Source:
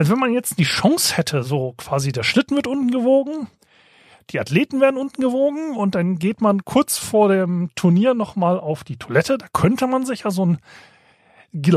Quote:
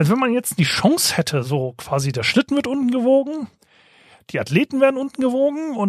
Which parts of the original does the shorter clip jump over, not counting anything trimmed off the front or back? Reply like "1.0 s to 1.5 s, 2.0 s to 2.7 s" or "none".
none